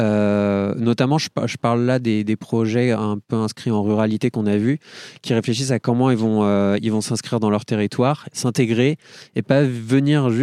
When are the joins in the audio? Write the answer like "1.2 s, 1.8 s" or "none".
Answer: none